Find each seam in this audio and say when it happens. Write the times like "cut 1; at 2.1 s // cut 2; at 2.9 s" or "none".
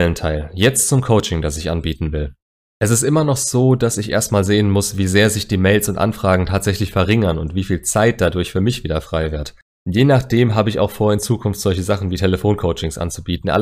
none